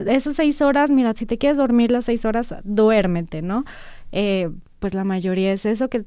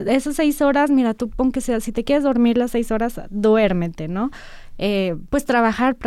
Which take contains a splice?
first; 2 cuts; at 1.2 s, 4.6 s

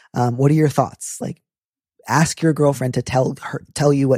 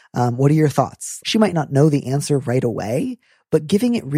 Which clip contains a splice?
second; 1 cut; at 1.2 s

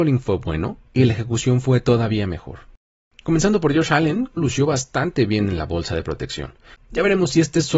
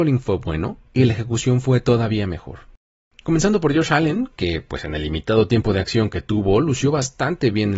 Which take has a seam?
first; 2 cuts; at 4.4 s, 6.7 s

